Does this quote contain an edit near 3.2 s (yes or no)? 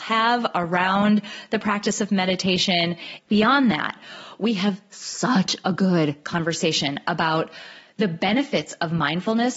yes